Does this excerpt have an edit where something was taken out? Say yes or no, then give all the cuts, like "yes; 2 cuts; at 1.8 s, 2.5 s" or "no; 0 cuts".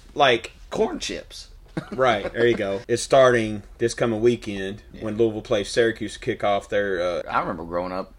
yes; 2 cuts; at 2.8 s, 7.2 s